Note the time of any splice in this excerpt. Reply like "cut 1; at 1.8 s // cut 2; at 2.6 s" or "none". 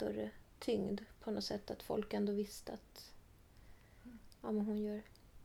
none